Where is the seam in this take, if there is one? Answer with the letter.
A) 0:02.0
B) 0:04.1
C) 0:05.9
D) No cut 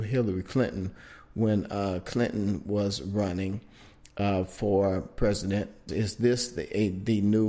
C